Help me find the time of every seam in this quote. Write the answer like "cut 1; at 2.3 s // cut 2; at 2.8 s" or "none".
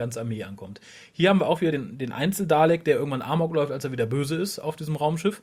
none